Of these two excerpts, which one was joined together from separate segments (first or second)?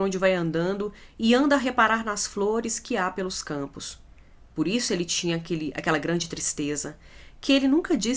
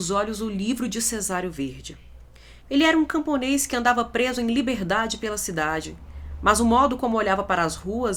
second